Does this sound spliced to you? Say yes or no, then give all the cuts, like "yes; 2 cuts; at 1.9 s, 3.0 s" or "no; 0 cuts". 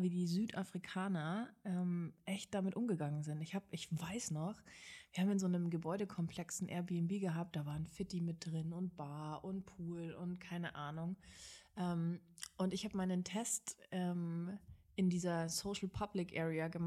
no; 0 cuts